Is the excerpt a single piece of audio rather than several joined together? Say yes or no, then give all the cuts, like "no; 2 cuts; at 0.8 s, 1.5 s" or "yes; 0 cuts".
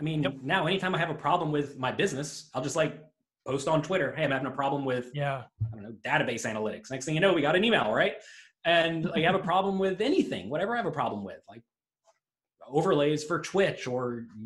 yes; 0 cuts